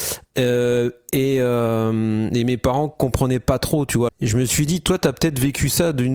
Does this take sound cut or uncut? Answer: cut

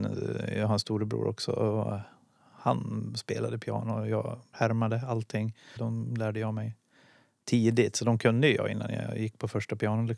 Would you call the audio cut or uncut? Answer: cut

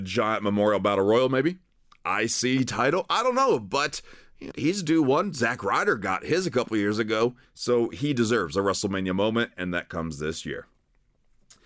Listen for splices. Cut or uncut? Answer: cut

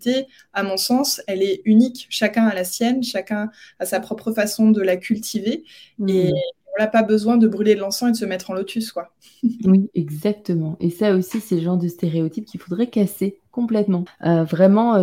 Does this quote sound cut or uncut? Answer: cut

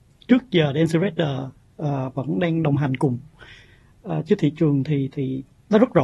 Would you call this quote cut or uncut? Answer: cut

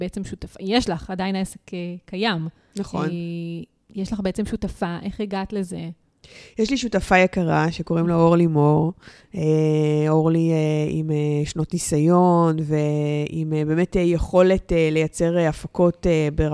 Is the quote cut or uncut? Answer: uncut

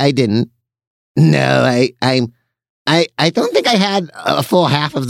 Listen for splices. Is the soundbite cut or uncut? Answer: cut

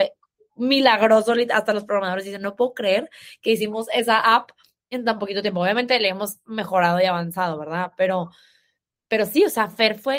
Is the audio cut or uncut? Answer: uncut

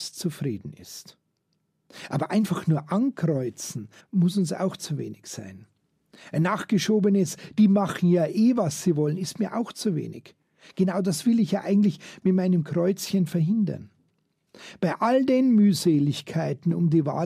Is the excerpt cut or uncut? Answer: cut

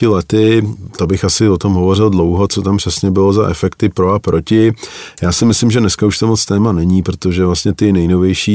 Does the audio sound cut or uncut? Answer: cut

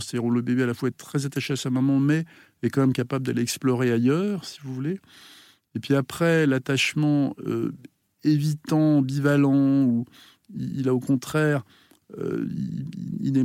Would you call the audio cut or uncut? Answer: uncut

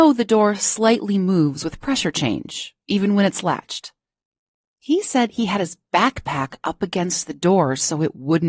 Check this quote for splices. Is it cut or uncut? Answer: uncut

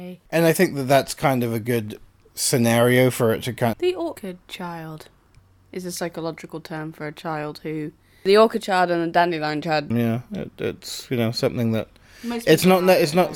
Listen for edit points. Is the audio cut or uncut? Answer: cut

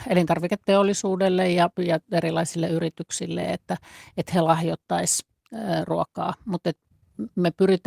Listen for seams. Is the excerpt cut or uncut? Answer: uncut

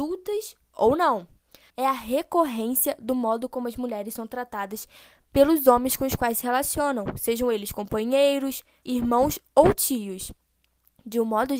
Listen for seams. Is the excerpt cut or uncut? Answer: cut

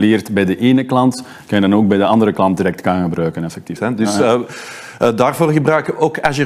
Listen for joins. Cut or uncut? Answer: cut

